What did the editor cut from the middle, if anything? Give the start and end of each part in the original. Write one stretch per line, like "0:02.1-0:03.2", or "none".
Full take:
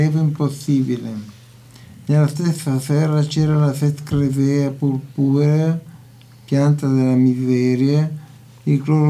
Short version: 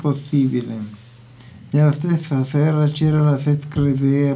none